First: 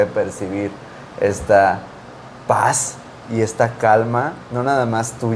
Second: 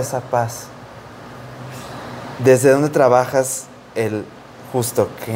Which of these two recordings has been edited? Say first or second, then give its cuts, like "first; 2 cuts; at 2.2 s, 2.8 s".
second; 1 cut; at 2.4 s